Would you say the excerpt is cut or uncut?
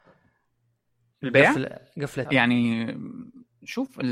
cut